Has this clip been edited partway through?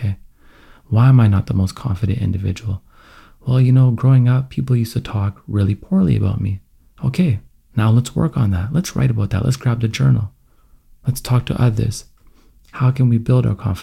no; 0 cuts

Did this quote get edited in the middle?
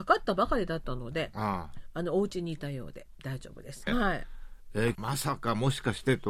yes; 2 cuts; at 3.9 s, 4.9 s

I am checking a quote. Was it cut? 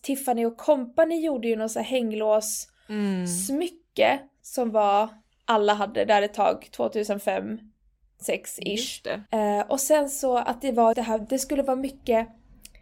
yes; 2 cuts; at 9.3 s, 10.9 s

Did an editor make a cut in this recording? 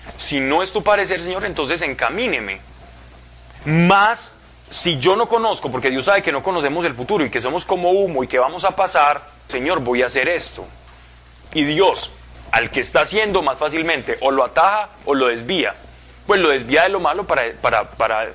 yes; 2 cuts; at 3.6 s, 9.5 s

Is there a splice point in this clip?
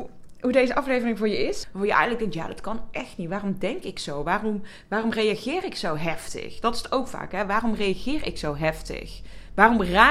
yes; 1 cut; at 1.6 s

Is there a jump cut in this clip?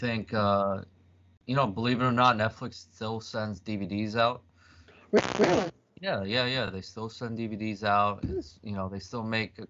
no; 0 cuts

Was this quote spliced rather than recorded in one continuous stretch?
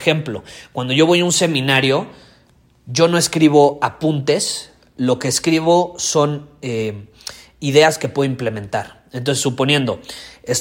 no; 0 cuts

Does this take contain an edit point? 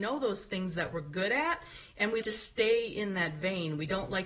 yes; 1 cut; at 2.2 s

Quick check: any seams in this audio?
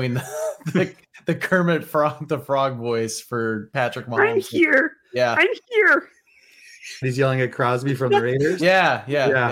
yes; 1 cut; at 7.0 s

